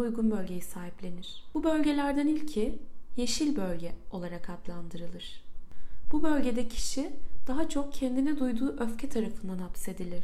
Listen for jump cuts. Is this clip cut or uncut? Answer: uncut